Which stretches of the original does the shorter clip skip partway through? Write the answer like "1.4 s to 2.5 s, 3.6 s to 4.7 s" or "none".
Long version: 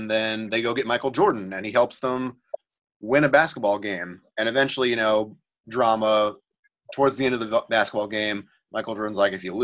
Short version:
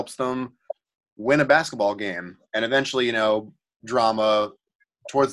none